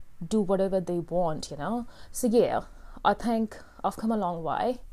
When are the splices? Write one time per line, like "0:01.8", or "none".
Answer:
none

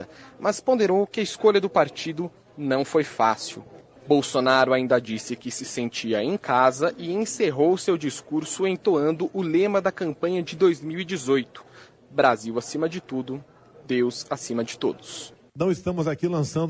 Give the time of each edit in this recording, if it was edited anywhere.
none

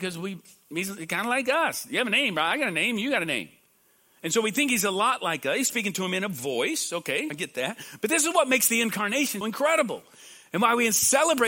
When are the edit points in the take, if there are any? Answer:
0:07.3
0:09.4

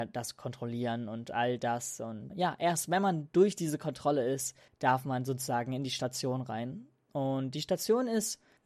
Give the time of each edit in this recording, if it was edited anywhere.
0:02.3

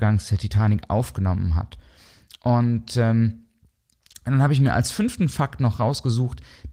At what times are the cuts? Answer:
none

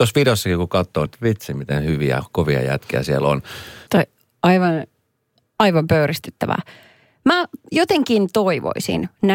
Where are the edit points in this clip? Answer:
0:01.1
0:03.9

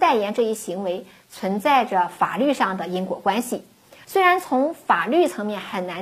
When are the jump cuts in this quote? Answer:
0:04.0

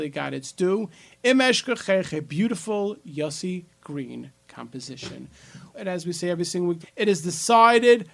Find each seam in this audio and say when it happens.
0:05.7
0:06.8

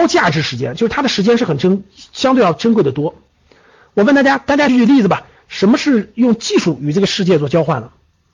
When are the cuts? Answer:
0:04.7

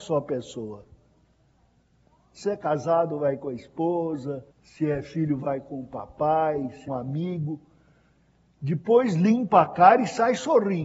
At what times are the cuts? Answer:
0:04.5
0:06.9

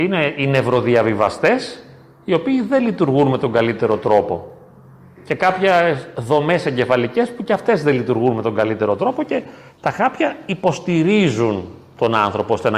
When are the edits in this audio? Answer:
none

